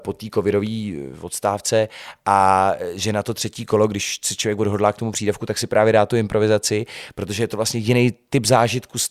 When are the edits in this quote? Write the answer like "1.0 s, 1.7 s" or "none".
none